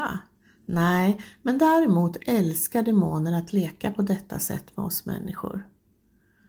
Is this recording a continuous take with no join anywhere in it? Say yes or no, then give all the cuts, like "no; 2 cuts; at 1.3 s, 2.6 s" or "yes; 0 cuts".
yes; 0 cuts